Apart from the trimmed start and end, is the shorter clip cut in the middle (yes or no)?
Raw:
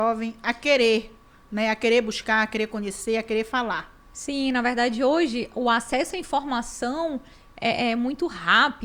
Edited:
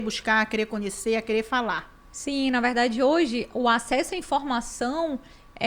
no